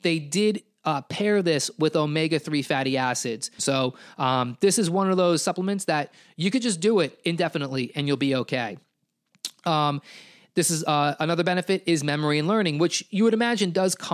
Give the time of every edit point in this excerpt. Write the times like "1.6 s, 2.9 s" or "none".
3.6 s